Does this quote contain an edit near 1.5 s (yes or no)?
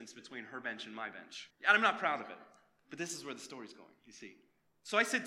yes